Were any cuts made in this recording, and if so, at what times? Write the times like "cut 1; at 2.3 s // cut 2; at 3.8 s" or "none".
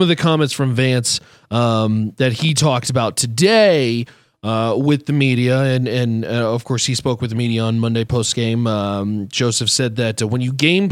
none